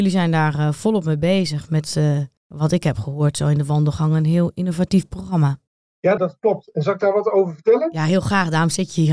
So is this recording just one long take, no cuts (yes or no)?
yes